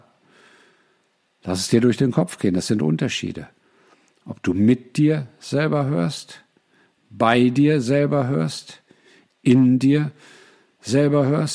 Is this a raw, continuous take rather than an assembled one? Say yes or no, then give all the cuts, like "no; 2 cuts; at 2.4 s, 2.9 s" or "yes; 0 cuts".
yes; 0 cuts